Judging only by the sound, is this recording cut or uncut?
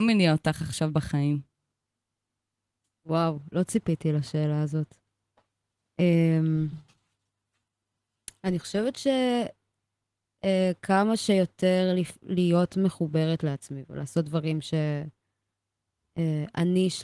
uncut